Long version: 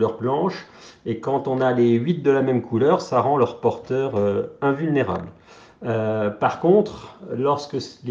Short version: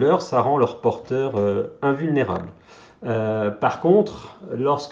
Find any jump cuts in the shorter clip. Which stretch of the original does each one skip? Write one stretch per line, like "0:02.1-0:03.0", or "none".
none